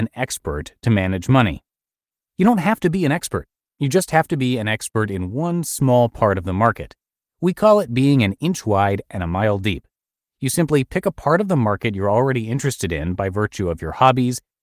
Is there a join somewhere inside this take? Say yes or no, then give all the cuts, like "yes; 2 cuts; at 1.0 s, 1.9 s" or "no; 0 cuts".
yes; 1 cut; at 2.3 s